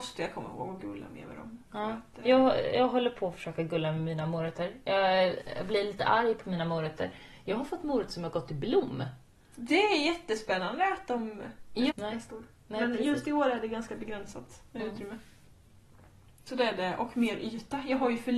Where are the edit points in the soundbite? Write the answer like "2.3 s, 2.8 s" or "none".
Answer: 11.9 s